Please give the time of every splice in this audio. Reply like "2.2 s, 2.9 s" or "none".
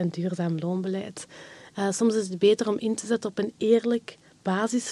1.7 s